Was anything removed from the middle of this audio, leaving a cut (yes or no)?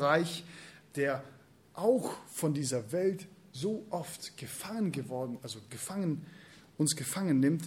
no